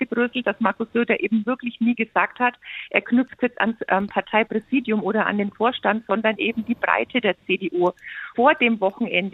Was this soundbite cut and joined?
no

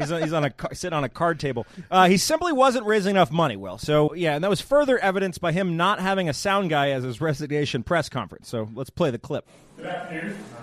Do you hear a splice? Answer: yes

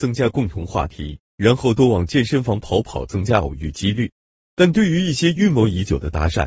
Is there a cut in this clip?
yes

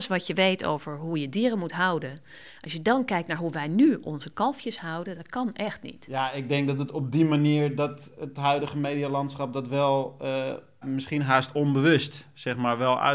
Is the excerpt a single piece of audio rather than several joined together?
no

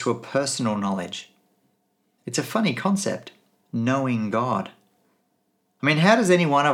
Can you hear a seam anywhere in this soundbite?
no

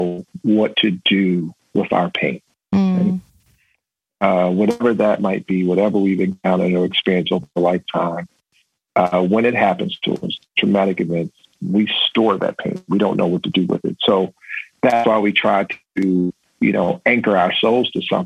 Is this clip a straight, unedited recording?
yes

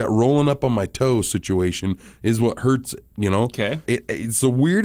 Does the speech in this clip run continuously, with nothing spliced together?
no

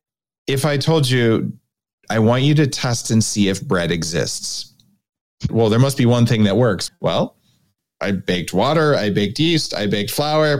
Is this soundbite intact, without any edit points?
no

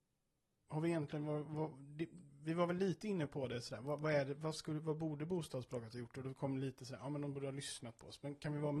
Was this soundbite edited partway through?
no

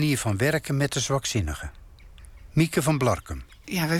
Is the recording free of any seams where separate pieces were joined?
yes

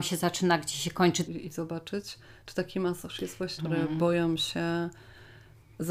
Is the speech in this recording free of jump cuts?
no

